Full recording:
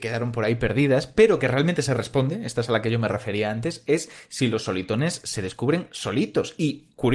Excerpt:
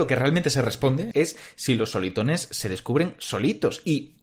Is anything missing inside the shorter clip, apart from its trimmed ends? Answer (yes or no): yes